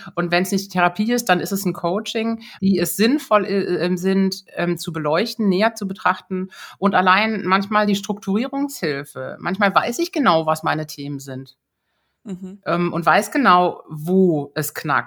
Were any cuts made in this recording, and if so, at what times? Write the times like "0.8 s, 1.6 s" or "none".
2.6 s